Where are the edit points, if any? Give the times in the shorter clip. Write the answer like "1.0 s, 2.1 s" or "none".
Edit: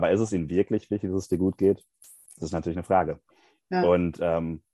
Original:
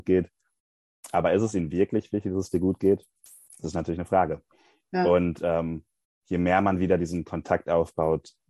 none